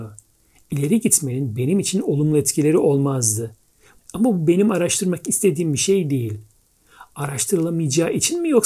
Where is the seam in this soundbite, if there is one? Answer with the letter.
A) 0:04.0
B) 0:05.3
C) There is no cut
A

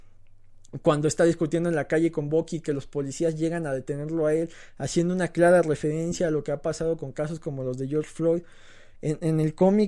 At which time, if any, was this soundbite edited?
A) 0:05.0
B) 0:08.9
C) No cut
B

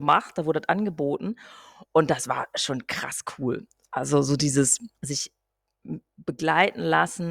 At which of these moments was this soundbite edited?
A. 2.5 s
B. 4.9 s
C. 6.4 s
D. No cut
B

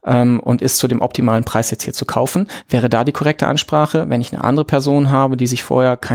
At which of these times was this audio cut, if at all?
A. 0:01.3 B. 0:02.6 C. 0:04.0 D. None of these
D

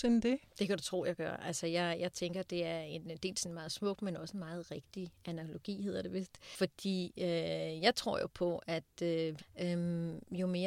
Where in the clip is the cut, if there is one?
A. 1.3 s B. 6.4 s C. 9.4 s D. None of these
C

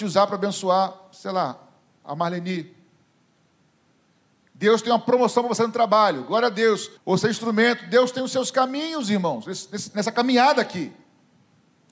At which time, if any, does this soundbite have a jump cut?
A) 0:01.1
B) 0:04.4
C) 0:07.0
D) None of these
C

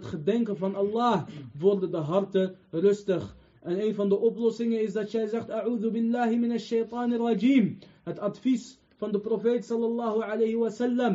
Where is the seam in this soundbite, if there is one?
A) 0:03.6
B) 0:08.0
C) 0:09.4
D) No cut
D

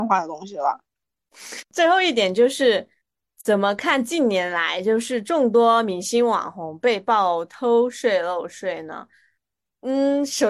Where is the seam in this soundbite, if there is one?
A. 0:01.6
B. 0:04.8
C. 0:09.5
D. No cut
A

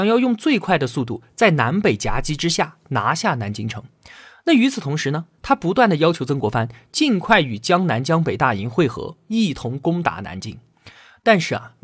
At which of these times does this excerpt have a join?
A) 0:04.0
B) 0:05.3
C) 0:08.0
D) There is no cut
D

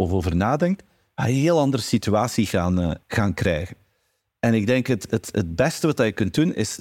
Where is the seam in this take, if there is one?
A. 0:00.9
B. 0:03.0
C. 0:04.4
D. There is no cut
B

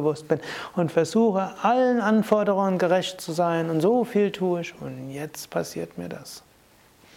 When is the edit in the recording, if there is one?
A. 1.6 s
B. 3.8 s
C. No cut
C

